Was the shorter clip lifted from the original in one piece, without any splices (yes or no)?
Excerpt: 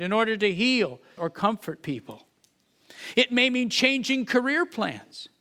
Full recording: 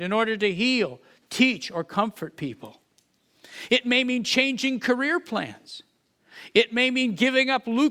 no